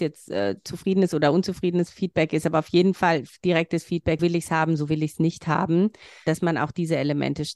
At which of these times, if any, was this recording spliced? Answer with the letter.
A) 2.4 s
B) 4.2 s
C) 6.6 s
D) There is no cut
B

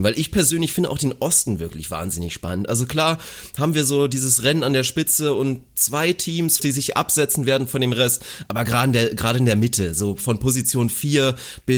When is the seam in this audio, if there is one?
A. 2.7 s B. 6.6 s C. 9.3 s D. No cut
B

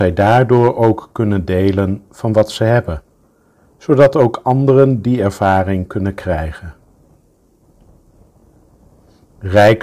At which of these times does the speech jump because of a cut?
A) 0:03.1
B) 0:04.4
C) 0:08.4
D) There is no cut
D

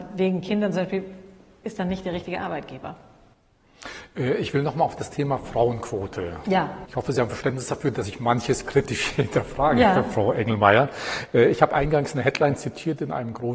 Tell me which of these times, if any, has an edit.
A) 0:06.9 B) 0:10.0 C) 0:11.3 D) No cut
A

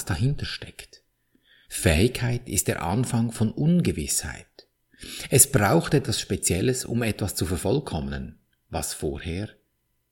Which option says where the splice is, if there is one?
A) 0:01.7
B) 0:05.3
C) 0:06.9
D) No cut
D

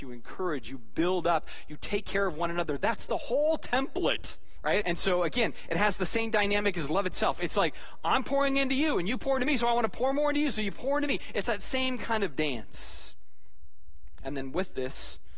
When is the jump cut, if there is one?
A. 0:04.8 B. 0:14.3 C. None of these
A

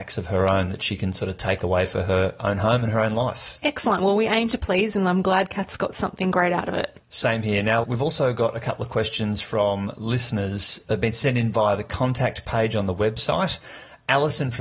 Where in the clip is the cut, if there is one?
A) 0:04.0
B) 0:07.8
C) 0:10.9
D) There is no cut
B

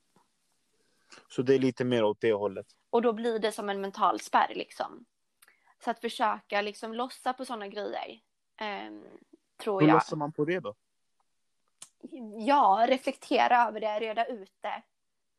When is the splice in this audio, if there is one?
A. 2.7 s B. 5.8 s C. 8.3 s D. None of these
A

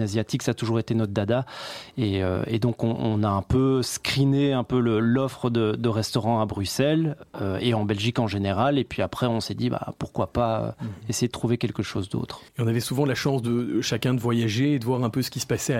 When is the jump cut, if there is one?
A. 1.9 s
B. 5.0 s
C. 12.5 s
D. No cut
C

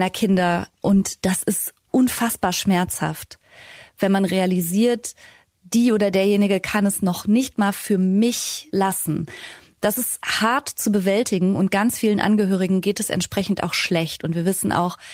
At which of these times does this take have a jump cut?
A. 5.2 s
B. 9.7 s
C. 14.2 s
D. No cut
D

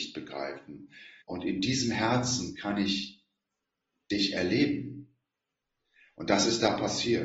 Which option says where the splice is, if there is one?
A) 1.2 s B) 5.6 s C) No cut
A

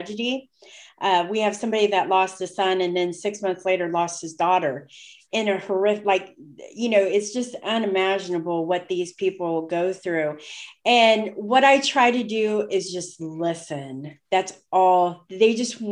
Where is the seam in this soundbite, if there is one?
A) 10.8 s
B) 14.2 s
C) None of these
B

